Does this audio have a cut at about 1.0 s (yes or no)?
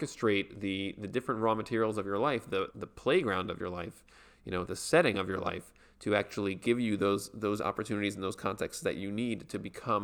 no